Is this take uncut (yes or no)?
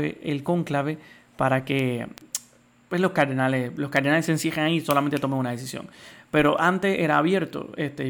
yes